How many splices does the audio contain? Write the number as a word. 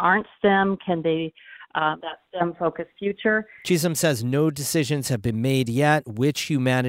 one